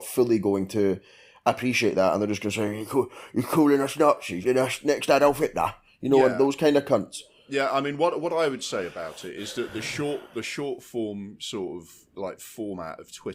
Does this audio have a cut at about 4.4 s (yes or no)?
yes